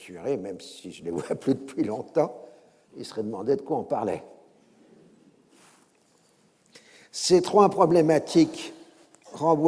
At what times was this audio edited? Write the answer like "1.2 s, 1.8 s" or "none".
2.9 s